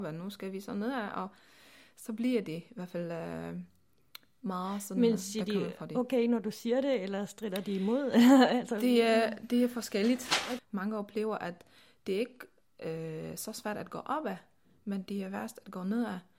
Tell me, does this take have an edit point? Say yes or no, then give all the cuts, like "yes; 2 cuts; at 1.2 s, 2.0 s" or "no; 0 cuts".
yes; 1 cut; at 10.6 s